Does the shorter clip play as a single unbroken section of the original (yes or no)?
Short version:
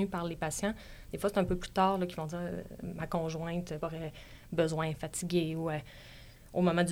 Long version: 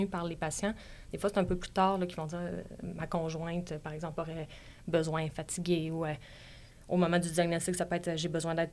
no